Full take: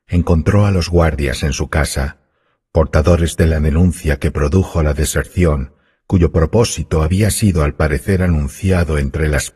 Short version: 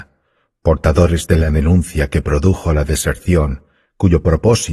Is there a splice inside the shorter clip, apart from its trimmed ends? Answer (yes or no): no